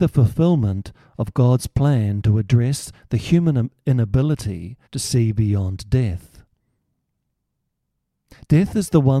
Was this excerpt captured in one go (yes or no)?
no